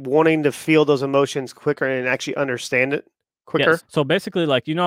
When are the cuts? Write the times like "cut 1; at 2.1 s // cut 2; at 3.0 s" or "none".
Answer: cut 1; at 3.8 s